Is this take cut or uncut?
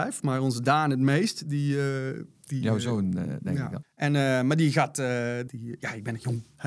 cut